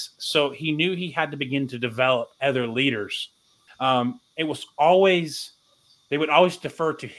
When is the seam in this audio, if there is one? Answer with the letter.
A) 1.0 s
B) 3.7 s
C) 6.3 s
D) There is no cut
B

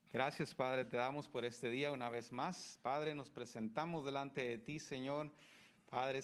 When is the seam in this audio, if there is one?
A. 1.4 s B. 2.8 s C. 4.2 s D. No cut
D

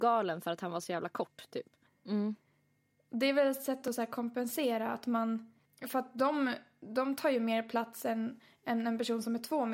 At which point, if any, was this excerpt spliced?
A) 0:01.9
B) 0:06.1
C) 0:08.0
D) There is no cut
A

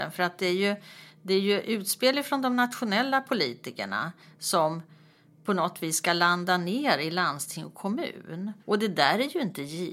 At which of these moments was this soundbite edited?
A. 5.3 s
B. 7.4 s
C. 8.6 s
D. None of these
C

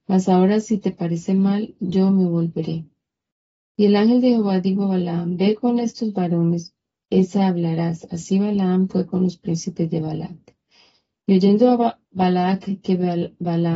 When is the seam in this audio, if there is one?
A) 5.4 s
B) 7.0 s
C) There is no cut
B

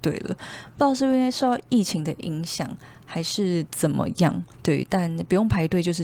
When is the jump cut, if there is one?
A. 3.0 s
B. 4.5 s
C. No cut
B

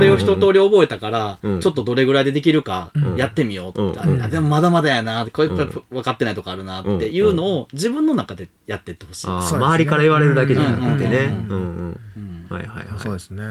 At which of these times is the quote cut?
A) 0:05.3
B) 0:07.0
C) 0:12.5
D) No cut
D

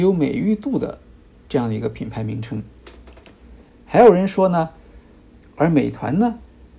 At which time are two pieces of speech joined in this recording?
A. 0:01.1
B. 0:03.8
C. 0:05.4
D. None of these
C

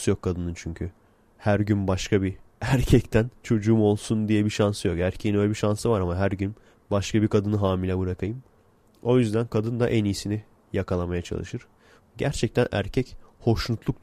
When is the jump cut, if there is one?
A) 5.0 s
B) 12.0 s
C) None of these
B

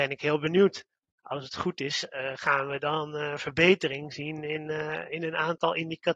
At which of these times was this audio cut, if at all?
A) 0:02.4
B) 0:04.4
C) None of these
C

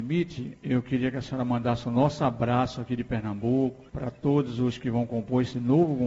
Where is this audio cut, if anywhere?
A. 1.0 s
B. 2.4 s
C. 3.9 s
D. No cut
C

